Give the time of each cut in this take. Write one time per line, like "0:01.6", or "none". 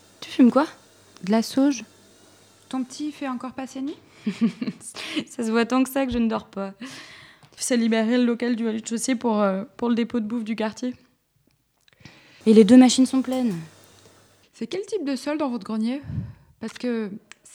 0:07.6
0:12.4
0:14.4